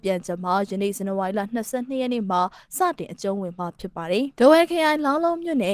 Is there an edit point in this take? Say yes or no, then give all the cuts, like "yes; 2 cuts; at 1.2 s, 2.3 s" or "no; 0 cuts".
yes; 1 cut; at 4.3 s